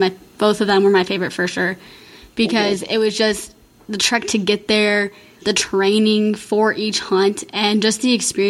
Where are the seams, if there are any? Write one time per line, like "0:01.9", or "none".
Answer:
0:05.4

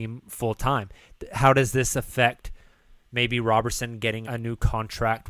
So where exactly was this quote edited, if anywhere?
0:04.2

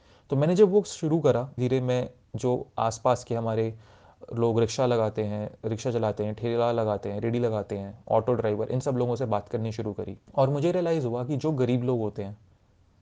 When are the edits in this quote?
0:01.6
0:10.3

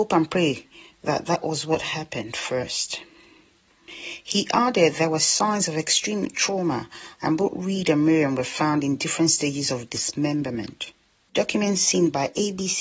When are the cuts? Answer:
0:07.1
0:11.3

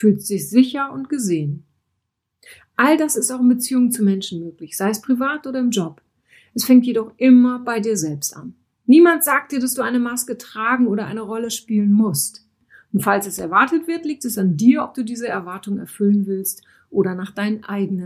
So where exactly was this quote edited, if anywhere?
none

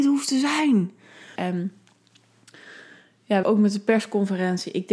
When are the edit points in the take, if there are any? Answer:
0:01.4
0:03.4

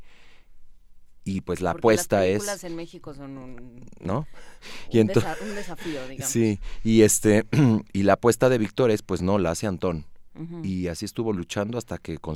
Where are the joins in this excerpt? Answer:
none

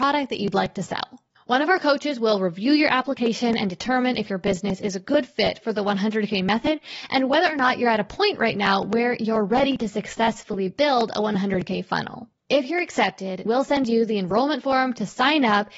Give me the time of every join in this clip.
0:12.3
0:13.5

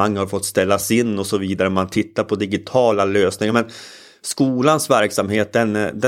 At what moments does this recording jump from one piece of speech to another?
none

